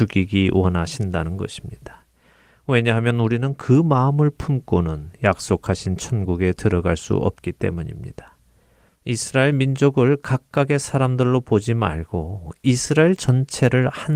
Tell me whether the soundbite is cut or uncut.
cut